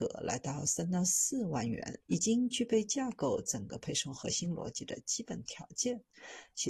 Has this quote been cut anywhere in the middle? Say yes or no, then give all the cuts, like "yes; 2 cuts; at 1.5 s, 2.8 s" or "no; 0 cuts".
yes; 1 cut; at 2.0 s